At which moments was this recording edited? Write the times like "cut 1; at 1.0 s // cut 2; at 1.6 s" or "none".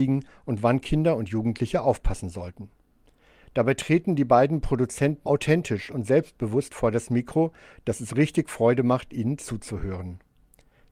cut 1; at 5.3 s